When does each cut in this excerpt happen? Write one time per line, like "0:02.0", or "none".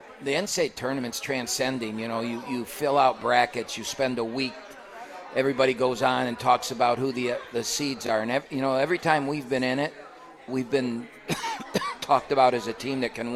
0:10.5